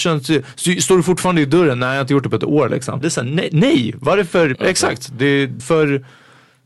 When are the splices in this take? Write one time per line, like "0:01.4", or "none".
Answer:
0:03.0
0:04.5
0:05.6